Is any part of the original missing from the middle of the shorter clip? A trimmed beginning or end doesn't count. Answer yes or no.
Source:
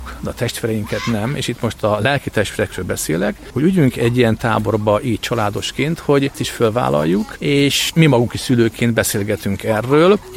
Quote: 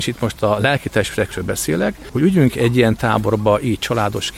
no